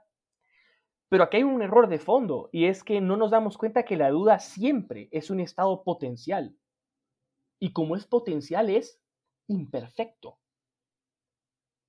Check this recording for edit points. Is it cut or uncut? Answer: uncut